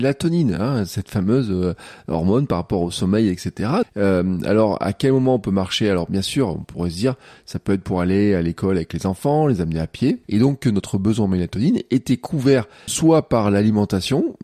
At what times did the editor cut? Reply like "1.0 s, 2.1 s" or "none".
3.8 s, 10.2 s, 12.9 s